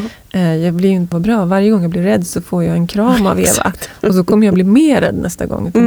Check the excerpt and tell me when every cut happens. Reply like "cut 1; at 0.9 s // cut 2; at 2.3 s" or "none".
cut 1; at 1.1 s